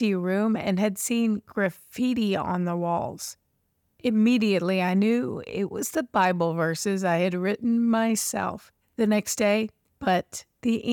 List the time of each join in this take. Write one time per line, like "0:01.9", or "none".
0:09.9